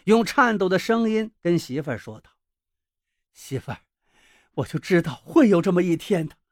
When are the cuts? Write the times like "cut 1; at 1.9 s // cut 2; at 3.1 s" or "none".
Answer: none